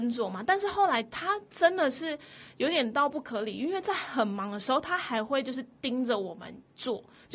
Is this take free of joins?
yes; 0 cuts

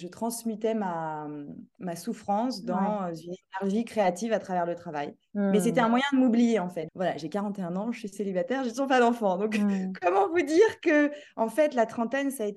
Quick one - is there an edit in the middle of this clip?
yes; 1 cut; at 6.9 s

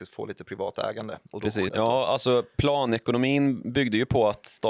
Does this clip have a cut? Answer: yes; 1 cut; at 1.7 s

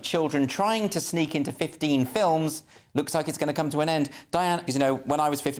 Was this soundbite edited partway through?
yes; 1 cut; at 4.7 s

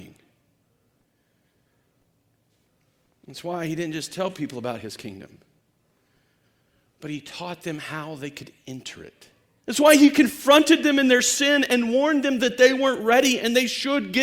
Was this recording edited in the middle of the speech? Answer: yes; 1 cut; at 9.6 s

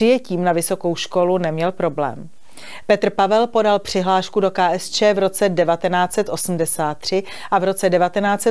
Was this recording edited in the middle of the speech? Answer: yes; 1 cut; at 2.8 s

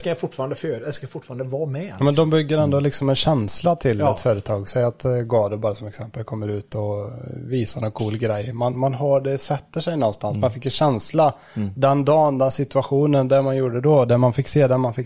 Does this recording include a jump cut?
no; 0 cuts

